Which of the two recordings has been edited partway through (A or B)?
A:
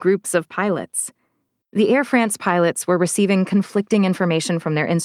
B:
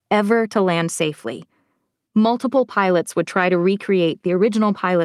A